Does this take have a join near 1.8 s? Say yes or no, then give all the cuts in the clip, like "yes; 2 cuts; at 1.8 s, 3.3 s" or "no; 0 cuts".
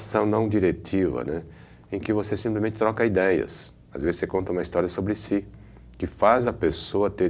no; 0 cuts